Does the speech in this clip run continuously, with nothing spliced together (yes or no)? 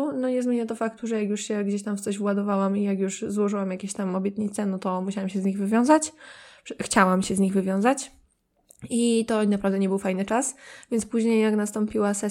yes